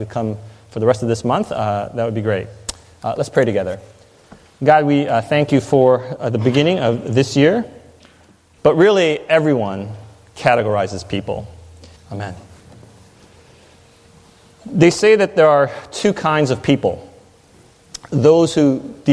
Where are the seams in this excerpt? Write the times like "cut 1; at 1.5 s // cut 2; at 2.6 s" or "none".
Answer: cut 1; at 8.6 s // cut 2; at 12.0 s